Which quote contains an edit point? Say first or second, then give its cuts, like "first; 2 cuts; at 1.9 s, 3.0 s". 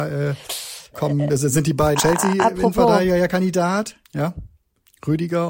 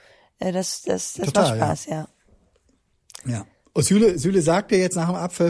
first; 3 cuts; at 0.9 s, 2.0 s, 4.0 s